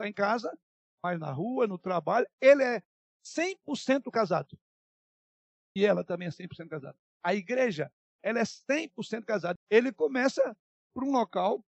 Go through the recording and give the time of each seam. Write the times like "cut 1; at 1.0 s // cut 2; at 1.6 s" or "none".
cut 1; at 9.6 s